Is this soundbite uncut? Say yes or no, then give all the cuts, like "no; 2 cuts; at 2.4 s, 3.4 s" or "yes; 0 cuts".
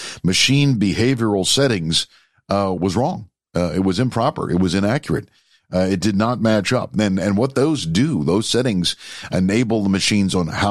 no; 1 cut; at 2.8 s